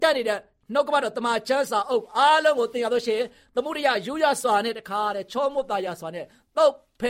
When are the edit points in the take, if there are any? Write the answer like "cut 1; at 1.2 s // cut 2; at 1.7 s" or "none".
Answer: none